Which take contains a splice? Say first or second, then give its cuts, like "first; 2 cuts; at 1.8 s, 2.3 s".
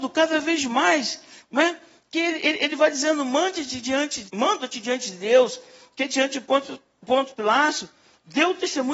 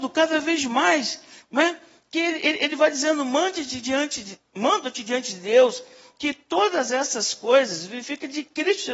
first; 2 cuts; at 4.3 s, 5.9 s